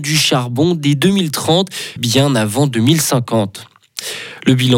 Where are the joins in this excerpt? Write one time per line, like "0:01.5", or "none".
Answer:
0:02.0